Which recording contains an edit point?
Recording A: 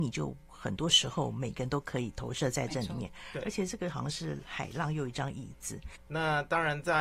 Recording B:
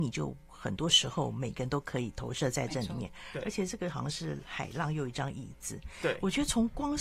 A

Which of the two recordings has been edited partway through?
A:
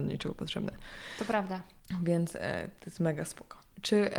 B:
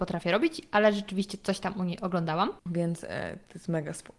B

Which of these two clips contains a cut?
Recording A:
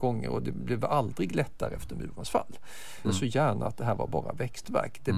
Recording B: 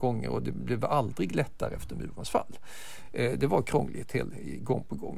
A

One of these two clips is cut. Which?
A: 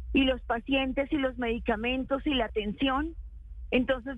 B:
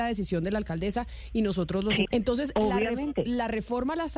B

